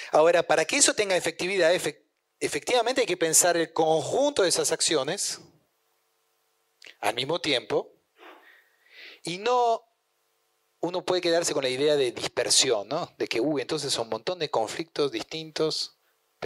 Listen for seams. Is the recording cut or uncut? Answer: uncut